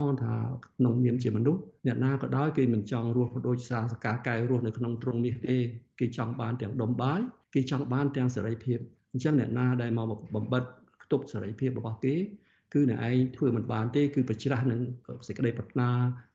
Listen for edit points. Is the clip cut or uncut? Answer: cut